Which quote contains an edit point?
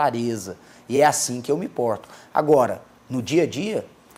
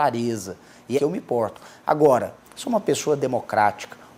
second; 2 cuts; at 1.0 s, 2.4 s

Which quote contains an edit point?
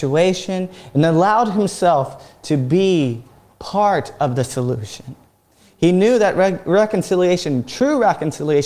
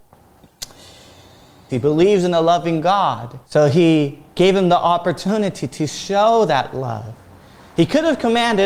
second; 2 cuts; at 1.7 s, 3.4 s

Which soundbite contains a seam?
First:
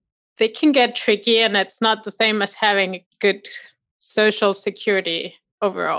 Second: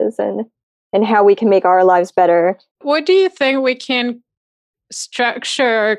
second; 1 cut; at 2.7 s

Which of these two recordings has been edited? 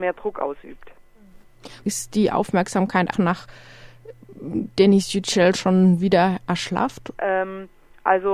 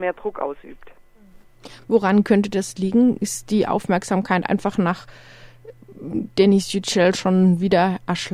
first; 3 cuts; at 1.8 s, 3.1 s, 7.1 s

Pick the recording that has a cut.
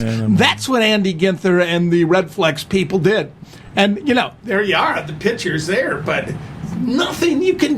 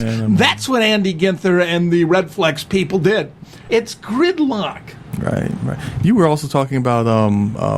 second; 1 cut; at 3.7 s

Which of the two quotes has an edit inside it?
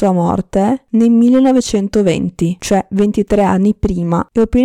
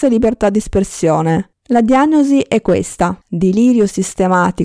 second; 2 cuts; at 1.5 s, 3.2 s

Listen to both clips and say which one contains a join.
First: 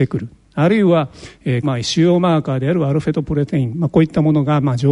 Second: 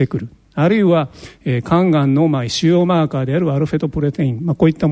first; 1 cut; at 1.6 s

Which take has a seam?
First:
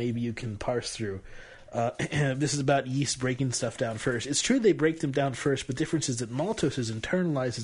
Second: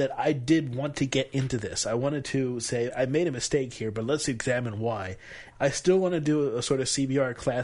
second; 2 cuts; at 2.9 s, 5.5 s

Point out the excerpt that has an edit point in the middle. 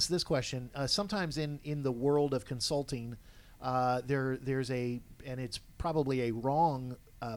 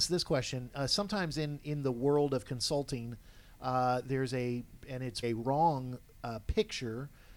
second; 2 cuts; at 4.0 s, 5.2 s

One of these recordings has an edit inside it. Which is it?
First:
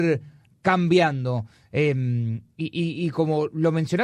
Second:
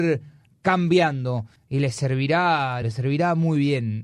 second; 2 cuts; at 1.6 s, 2.8 s

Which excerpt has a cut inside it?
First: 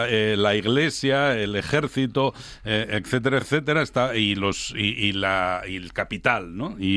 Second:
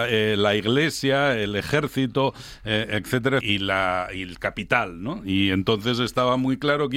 second; 1 cut; at 3.4 s

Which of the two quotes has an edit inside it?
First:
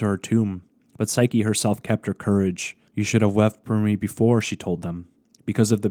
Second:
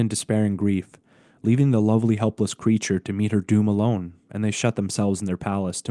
first; 1 cut; at 2.9 s

